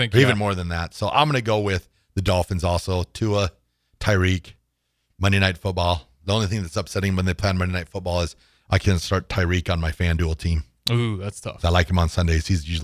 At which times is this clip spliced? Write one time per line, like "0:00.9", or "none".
none